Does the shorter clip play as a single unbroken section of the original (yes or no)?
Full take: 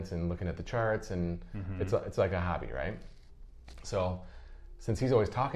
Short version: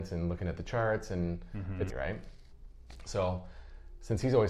no